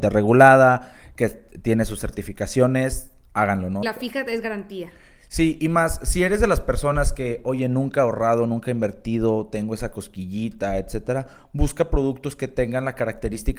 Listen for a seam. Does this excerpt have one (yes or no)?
yes